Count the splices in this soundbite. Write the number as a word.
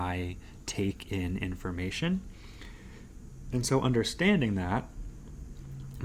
zero